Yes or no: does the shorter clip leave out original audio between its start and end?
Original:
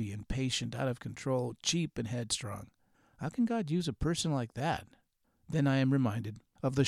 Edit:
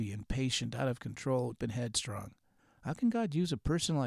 yes